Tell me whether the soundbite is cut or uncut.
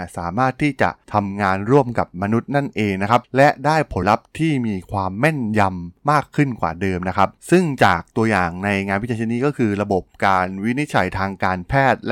cut